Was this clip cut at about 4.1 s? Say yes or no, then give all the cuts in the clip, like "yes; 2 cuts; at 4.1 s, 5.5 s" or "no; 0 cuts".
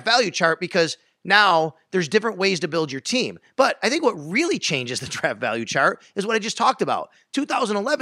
no; 0 cuts